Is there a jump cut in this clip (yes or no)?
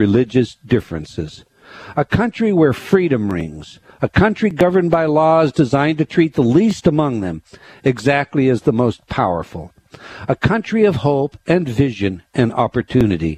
no